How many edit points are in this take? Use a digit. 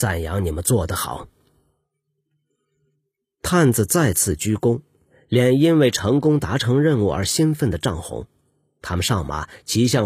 0